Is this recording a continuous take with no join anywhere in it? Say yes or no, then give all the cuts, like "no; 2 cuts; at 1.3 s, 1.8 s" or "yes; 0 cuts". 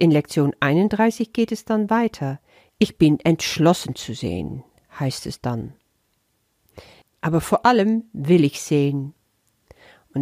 no; 2 cuts; at 2.7 s, 7.0 s